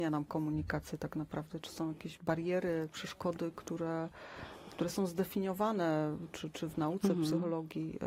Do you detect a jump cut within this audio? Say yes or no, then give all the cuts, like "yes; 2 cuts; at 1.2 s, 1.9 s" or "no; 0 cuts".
no; 0 cuts